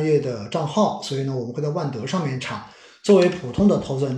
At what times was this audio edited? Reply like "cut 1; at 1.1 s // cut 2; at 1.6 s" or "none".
none